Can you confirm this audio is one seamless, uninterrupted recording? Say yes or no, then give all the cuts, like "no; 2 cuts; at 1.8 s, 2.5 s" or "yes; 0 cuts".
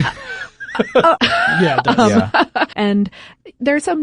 no; 2 cuts; at 1.2 s, 2.7 s